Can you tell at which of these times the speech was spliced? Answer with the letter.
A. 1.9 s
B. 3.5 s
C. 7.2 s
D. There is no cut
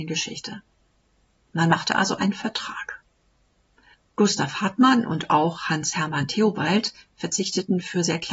D